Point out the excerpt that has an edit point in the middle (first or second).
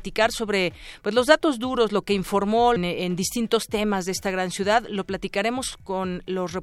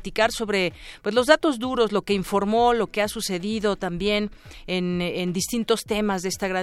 first